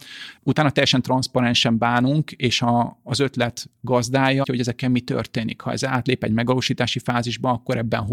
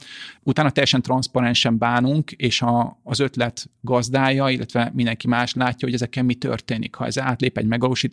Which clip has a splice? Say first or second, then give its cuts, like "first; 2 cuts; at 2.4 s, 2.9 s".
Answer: first; 1 cut; at 4.4 s